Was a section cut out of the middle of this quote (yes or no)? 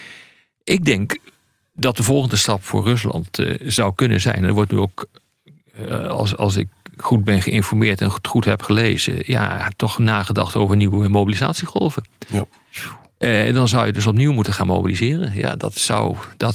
no